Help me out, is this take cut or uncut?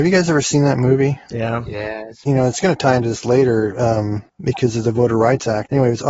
uncut